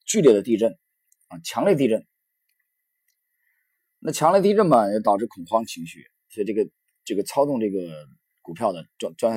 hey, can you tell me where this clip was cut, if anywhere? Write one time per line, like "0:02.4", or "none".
none